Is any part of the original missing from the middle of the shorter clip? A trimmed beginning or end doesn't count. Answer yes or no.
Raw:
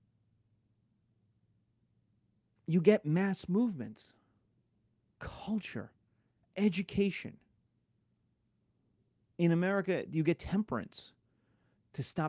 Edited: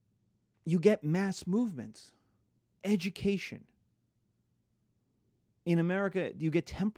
yes